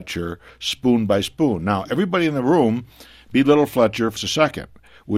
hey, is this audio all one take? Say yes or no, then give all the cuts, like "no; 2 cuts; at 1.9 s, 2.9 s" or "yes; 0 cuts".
no; 1 cut; at 4.2 s